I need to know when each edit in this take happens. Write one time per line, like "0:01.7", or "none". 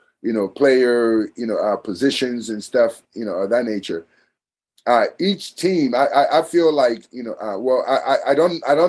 none